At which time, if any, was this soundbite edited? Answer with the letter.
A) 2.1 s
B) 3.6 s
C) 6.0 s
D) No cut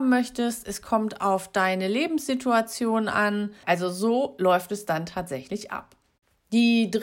B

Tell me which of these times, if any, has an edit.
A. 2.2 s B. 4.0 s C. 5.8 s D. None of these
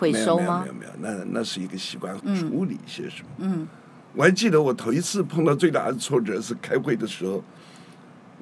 A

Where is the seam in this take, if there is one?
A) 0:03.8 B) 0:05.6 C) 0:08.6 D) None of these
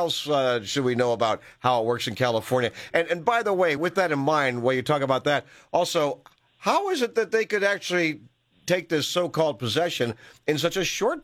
D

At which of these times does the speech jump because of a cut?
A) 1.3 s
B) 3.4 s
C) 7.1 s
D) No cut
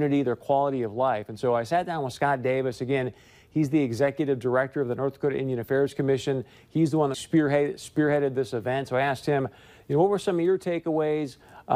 C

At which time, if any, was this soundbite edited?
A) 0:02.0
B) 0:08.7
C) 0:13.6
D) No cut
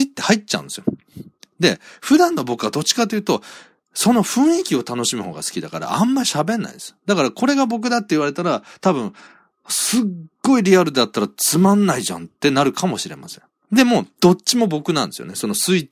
C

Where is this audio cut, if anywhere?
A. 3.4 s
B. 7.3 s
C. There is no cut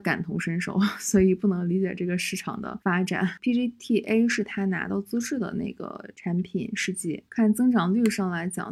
A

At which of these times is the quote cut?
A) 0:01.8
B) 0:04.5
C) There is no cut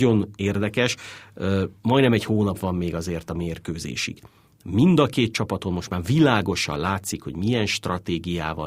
A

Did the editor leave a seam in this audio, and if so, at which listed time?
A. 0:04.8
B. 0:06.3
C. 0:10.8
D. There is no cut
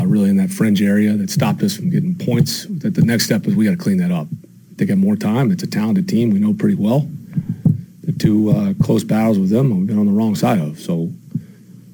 A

